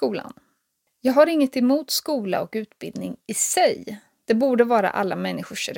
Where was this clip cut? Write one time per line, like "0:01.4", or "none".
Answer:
0:04.2